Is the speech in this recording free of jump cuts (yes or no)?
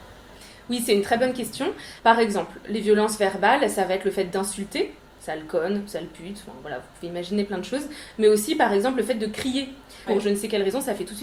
no